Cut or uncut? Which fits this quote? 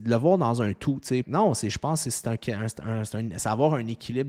cut